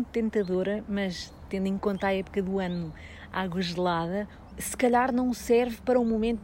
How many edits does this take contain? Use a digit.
1